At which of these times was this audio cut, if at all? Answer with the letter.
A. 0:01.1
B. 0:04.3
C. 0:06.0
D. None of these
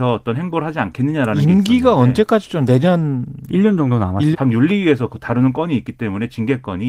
B